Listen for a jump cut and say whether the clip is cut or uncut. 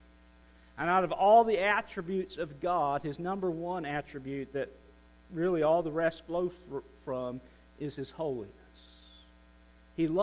uncut